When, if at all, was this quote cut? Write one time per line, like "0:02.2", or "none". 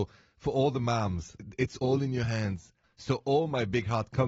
0:02.8